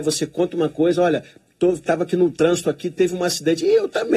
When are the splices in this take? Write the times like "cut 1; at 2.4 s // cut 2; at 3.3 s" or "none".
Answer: none